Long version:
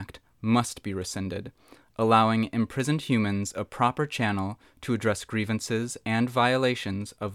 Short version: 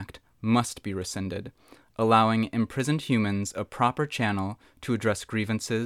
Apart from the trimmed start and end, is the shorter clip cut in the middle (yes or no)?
no